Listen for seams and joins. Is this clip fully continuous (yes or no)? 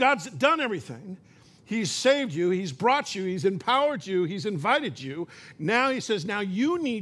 yes